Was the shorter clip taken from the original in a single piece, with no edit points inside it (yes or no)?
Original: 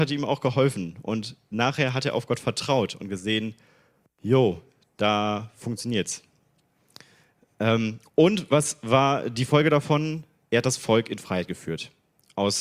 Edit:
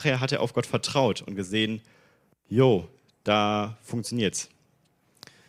yes